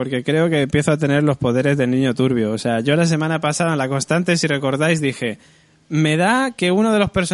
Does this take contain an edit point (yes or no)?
no